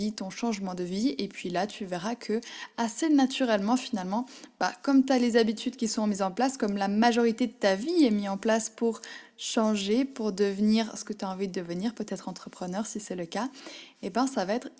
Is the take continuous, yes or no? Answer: yes